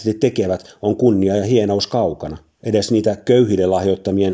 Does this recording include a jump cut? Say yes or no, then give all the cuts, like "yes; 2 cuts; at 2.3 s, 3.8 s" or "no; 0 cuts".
no; 0 cuts